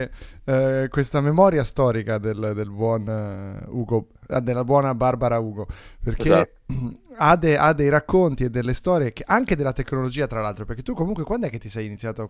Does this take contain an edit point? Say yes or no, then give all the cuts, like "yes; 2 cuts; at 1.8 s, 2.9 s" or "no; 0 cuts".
no; 0 cuts